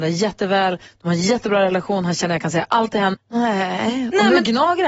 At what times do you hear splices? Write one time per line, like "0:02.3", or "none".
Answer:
0:03.1